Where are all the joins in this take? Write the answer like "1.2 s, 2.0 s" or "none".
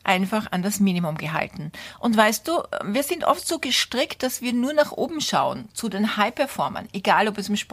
none

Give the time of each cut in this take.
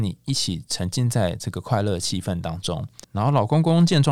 3.0 s

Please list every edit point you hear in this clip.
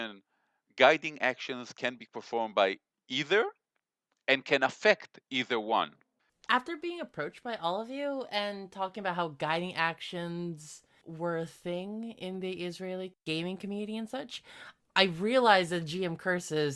6.3 s

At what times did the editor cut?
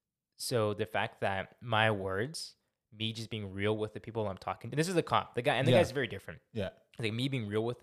none

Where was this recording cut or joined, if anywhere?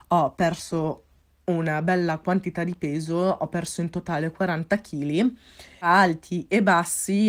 none

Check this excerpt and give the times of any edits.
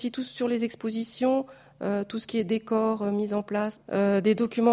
3.8 s

